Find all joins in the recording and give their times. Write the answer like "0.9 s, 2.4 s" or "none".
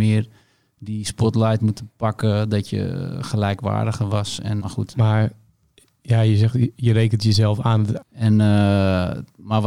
4.6 s, 8.0 s